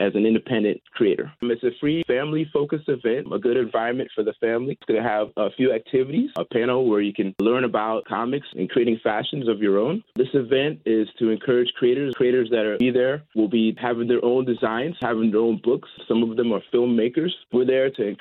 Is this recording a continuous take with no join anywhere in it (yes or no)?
no